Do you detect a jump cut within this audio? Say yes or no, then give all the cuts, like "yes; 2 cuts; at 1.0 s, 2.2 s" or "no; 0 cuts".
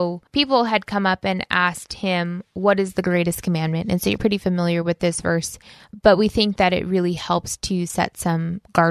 yes; 1 cut; at 4.2 s